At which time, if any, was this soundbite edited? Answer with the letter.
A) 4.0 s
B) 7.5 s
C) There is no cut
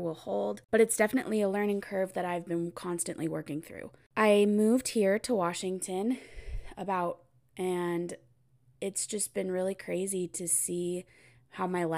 B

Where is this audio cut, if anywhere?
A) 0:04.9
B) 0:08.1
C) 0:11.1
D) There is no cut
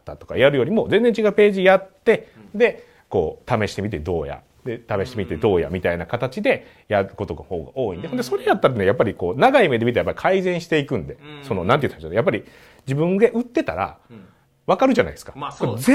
D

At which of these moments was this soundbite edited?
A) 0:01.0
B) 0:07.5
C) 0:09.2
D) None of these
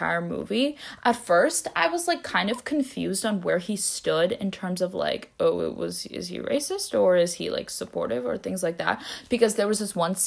D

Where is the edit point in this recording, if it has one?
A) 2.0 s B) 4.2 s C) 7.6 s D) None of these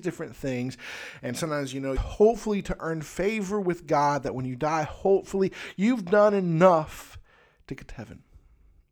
A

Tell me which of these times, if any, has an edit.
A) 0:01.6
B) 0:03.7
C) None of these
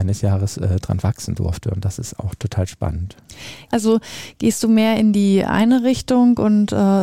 B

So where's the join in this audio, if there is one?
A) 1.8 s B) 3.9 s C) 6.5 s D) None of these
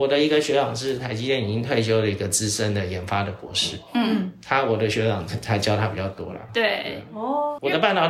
C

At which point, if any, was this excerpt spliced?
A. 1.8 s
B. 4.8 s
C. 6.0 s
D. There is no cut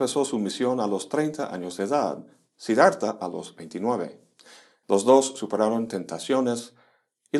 B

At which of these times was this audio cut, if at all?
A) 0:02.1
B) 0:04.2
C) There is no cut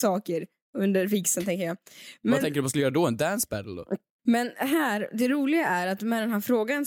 B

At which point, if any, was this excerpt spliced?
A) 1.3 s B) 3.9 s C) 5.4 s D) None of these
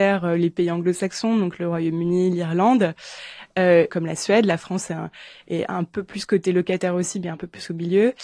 B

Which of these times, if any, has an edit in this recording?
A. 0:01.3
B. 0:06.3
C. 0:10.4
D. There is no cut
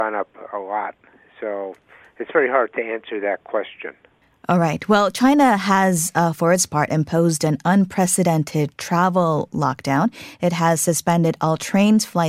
D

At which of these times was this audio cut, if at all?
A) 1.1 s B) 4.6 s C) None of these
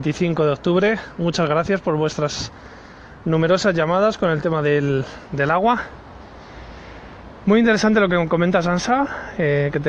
C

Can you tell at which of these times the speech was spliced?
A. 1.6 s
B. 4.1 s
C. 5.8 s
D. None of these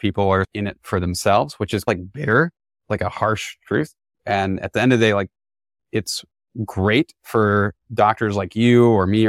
B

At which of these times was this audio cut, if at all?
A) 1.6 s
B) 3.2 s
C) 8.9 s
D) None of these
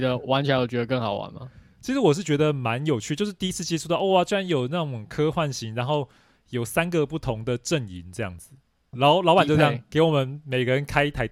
C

